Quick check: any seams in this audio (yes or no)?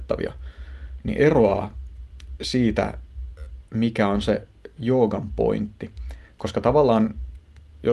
yes